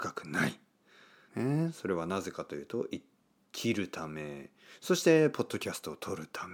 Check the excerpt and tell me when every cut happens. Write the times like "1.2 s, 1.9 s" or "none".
1.3 s